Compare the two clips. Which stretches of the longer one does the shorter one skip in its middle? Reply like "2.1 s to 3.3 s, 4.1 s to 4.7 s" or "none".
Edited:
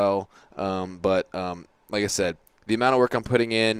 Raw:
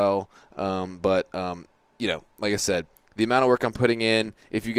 1.8 s to 2.3 s

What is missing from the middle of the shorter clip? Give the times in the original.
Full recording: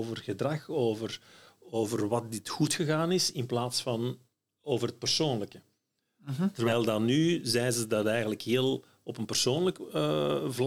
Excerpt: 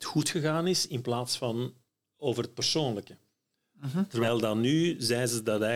none

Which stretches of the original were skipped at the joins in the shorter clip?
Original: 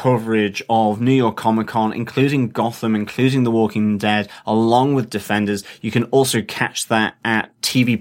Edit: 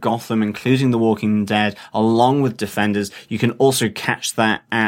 none

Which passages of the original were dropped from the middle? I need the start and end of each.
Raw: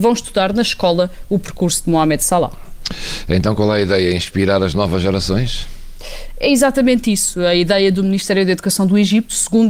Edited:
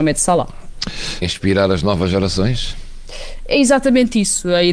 3.2 s to 4.1 s

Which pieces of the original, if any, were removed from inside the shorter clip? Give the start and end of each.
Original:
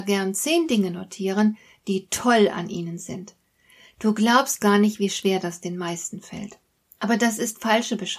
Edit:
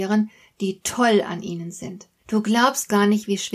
3.5 s to 3.9 s

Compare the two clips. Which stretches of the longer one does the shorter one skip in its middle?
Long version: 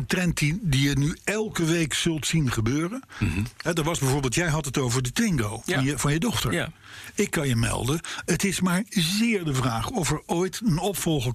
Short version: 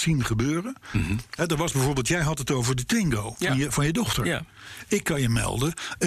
none

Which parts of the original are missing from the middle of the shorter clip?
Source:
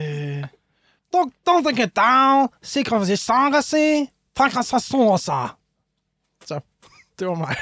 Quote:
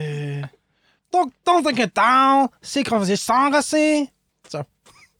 4.3 s to 6.3 s

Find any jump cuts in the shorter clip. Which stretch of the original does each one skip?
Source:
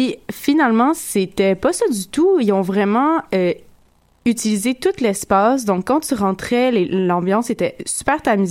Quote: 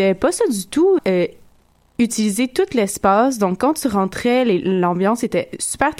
2.4 s to 3.2 s

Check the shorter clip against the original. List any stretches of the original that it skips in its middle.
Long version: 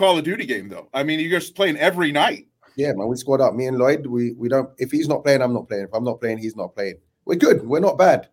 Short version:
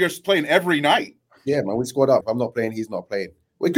3.5 s to 5.9 s

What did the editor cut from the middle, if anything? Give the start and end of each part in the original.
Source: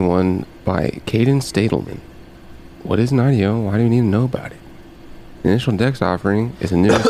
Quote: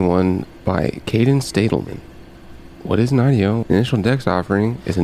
3.6 s to 5.4 s

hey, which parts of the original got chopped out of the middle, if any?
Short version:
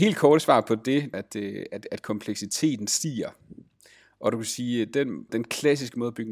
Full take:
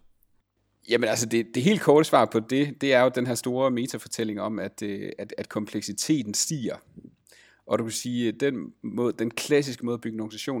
2.8 s to 4.6 s, 8.8 s to 9.2 s

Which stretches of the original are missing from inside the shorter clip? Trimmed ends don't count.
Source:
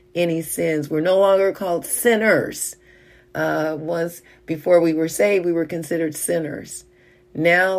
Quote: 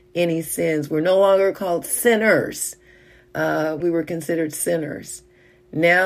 3.8 s to 5.4 s

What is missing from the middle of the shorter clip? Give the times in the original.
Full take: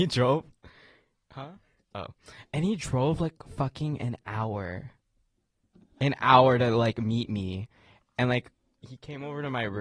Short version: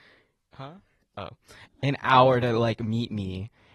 2.4 s to 5.8 s

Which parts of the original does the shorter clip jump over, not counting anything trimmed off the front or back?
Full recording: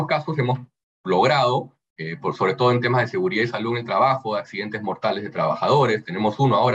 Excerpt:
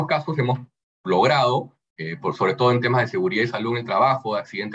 none

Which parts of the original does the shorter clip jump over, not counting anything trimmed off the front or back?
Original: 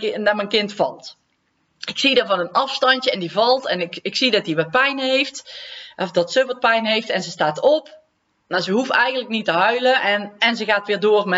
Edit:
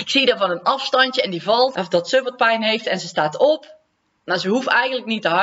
3.6 s to 6.0 s

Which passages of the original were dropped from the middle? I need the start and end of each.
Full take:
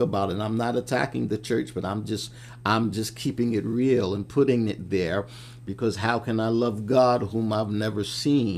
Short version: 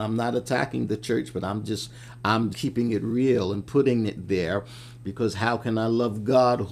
2.9 s to 3.1 s

